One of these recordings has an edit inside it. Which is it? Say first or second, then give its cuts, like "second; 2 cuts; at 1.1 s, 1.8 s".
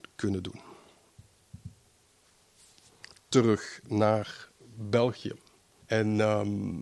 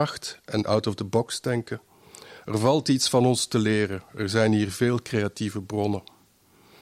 first; 1 cut; at 5.8 s